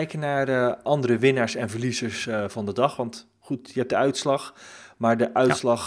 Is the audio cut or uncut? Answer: uncut